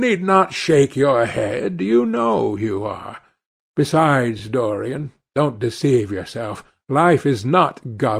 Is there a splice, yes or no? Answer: no